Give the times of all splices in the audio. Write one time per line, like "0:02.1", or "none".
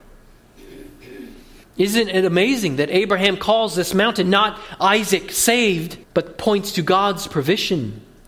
0:01.6
0:06.0

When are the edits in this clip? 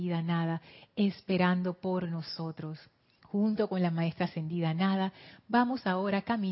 0:03.2

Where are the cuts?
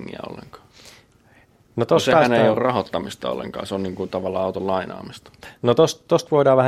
none

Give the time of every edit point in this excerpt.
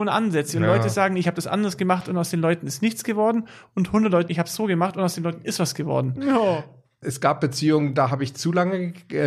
0:04.3
0:06.2

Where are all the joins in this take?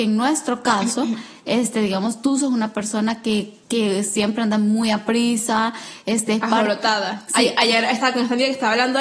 0:03.6

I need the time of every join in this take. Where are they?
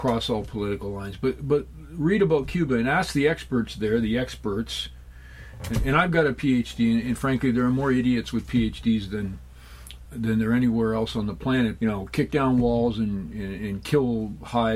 0:10.1
0:11.8

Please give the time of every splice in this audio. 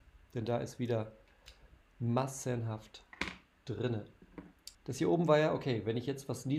0:01.8
0:04.7

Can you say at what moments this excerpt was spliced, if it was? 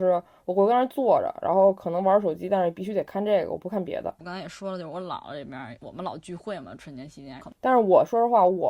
0:04.2
0:07.4

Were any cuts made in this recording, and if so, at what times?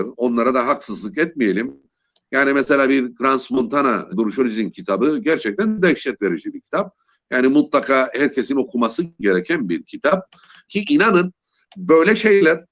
0:04.1
0:10.7

